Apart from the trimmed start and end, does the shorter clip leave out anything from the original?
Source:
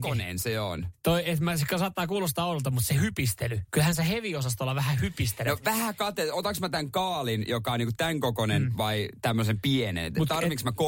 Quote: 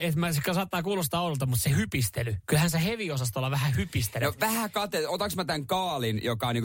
no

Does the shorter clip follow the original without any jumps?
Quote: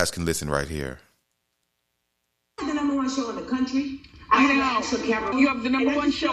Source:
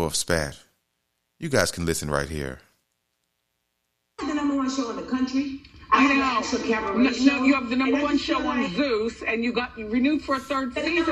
no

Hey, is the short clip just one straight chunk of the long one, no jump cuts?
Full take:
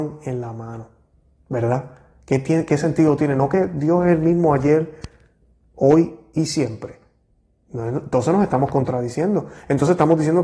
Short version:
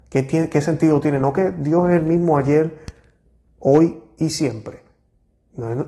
yes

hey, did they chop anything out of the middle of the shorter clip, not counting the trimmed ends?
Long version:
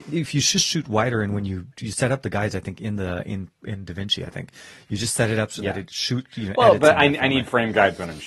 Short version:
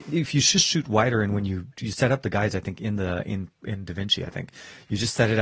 no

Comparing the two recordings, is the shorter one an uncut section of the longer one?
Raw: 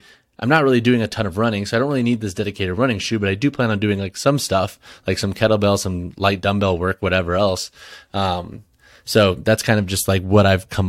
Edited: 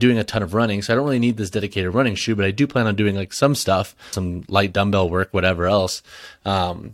no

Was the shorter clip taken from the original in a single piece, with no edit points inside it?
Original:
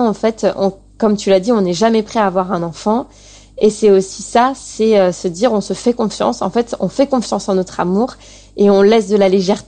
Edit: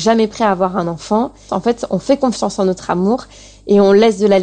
no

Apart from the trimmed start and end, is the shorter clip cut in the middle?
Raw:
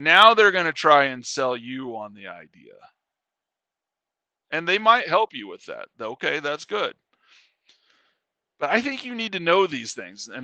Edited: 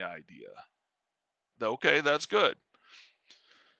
yes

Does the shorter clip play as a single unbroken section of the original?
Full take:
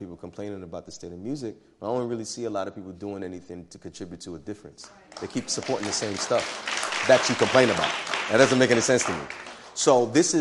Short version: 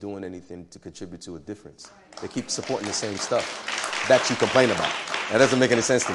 yes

